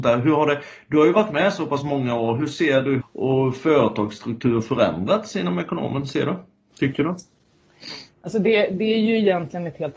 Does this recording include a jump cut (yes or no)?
yes